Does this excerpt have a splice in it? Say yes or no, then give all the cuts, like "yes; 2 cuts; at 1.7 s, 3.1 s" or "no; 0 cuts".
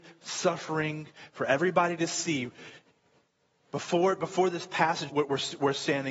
yes; 1 cut; at 5.1 s